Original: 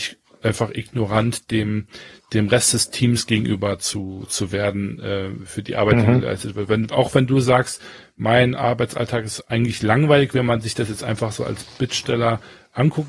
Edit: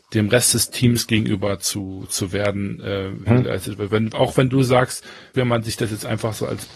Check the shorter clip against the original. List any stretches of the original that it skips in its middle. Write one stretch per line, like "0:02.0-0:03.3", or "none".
0:05.5-0:06.0
0:08.1-0:10.3